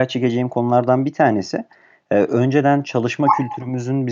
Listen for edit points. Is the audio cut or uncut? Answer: uncut